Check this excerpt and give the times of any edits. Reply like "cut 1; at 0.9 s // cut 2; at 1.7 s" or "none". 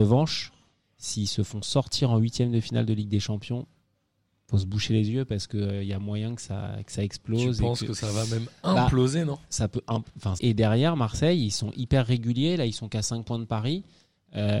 cut 1; at 10.4 s